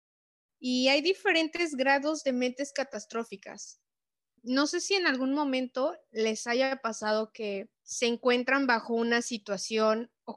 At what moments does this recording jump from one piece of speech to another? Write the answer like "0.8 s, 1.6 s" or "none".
4.4 s, 7.8 s